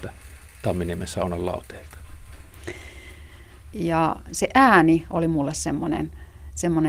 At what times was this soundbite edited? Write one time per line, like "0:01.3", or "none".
0:03.7